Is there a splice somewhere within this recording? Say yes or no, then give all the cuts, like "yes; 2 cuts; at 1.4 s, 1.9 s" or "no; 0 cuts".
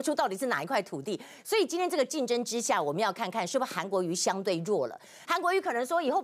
yes; 1 cut; at 5.3 s